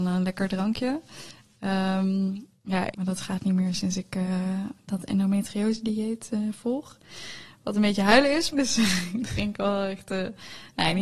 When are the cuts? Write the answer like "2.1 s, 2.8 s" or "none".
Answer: 2.9 s, 8.5 s